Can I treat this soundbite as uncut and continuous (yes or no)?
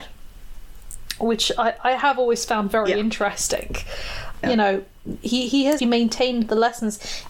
no